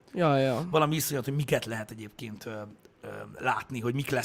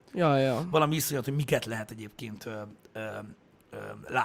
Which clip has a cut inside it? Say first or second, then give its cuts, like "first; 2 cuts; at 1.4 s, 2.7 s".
first; 1 cut; at 2.9 s